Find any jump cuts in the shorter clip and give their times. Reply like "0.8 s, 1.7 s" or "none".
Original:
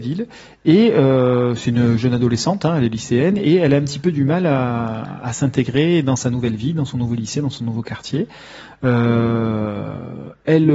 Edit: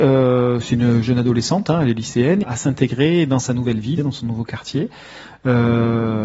2.4 s, 4.0 s